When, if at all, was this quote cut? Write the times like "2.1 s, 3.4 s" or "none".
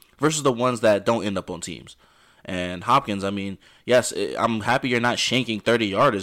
none